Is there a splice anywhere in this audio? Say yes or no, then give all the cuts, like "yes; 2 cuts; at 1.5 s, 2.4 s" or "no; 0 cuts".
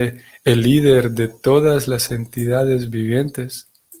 no; 0 cuts